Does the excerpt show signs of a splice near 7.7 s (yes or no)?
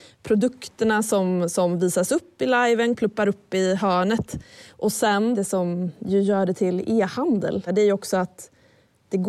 yes